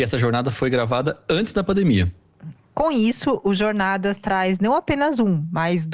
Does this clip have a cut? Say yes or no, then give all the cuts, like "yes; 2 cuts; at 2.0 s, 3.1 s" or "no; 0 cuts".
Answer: no; 0 cuts